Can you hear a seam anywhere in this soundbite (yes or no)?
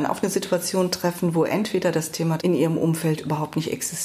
yes